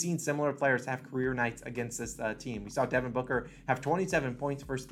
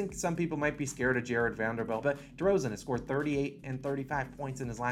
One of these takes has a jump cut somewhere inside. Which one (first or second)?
second